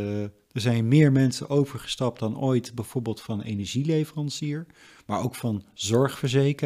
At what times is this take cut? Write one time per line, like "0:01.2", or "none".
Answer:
none